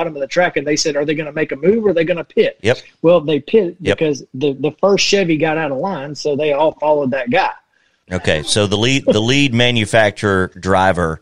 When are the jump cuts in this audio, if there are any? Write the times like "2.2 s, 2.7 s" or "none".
8.0 s